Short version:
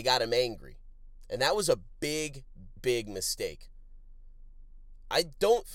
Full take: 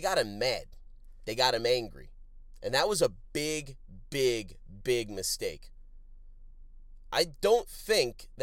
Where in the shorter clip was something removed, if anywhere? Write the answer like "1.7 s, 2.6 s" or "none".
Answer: 2.8 s